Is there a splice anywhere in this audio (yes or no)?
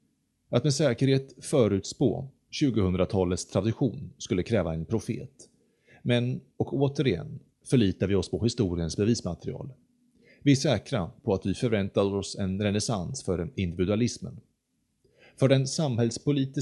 no